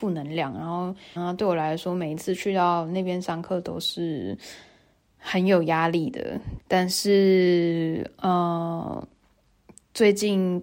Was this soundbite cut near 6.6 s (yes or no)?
yes